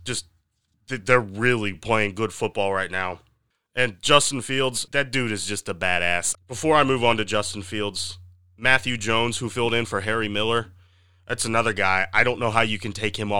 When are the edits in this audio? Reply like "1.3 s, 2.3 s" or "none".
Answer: 1.7 s, 4.9 s, 6.3 s